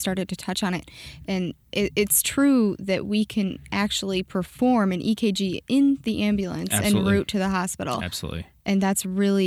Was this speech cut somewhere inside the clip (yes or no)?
no